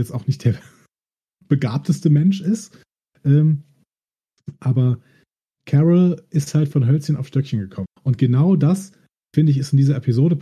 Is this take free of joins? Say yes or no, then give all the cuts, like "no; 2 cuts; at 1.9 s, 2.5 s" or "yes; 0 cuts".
no; 1 cut; at 7.8 s